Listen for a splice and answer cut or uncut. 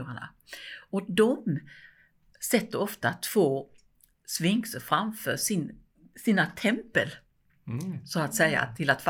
uncut